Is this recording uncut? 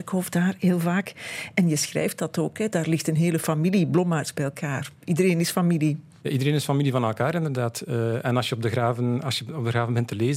yes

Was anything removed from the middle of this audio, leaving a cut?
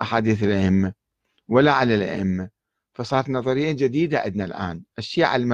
no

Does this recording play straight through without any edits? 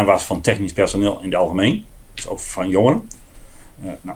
yes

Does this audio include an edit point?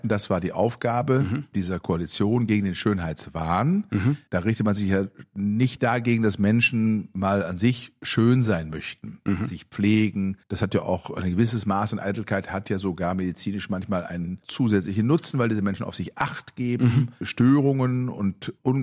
no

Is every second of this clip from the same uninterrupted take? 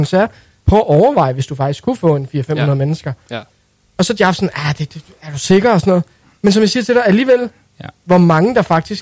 yes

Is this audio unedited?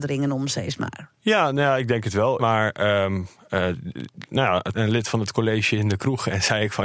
no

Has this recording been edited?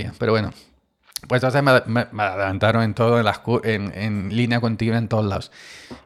no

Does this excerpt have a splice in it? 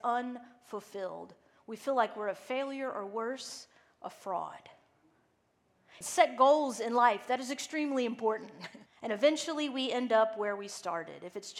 yes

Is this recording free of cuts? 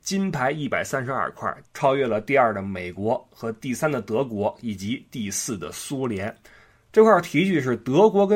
no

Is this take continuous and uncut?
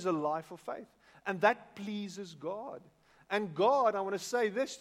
yes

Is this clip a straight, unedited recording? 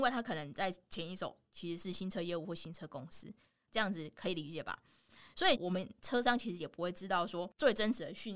no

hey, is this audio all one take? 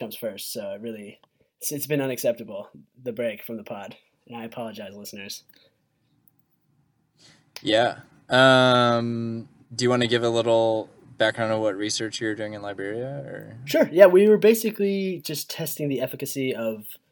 yes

